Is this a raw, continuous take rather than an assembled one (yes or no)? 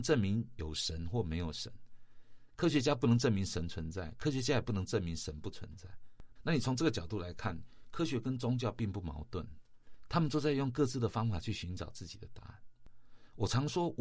no